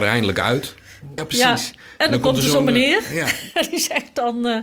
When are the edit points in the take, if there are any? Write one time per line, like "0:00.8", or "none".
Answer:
0:01.2